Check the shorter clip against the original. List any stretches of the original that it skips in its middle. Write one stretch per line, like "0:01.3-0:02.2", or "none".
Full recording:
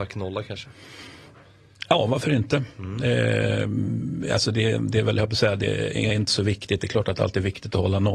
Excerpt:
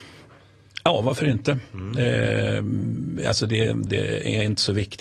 0:04.9-0:05.6